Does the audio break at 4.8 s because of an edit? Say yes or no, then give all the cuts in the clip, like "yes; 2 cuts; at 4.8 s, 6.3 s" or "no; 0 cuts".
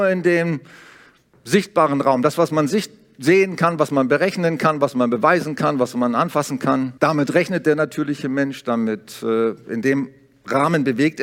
no; 1 cut; at 7.0 s